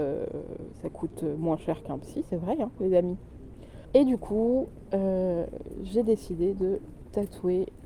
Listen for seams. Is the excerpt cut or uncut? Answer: cut